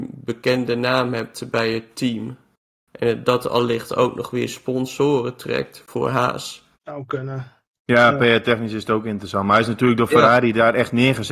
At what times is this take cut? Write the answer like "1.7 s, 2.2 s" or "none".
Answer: 6.7 s